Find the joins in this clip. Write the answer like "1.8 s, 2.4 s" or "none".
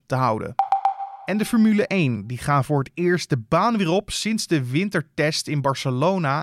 none

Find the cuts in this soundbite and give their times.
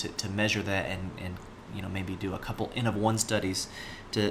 none

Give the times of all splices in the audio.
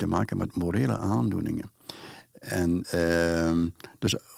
none

